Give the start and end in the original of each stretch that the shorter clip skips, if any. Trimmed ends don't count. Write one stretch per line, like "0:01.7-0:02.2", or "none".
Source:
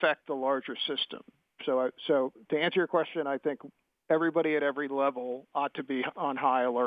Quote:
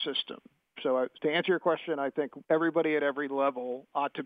0:02.0-0:02.4
0:03.7-0:04.0